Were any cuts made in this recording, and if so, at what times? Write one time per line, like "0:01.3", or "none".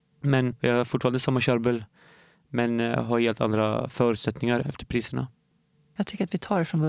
0:04.6